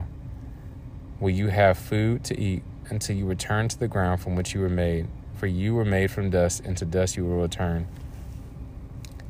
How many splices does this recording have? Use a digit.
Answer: 0